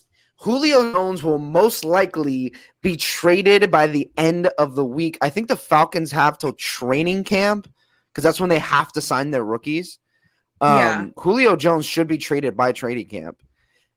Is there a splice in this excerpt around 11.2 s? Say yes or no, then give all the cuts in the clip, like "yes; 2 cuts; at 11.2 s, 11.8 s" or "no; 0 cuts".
yes; 1 cut; at 11.2 s